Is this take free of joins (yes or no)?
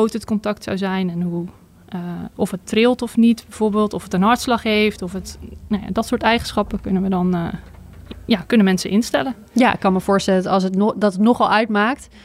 yes